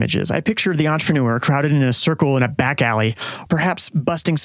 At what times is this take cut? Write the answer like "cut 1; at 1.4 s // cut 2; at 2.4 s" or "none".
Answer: cut 1; at 3.5 s